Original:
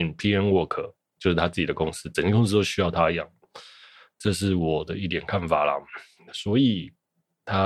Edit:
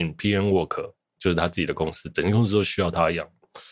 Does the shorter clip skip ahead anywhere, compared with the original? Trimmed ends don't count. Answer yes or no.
no